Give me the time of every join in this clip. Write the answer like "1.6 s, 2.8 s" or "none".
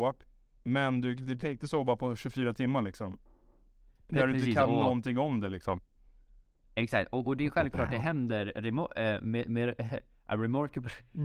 none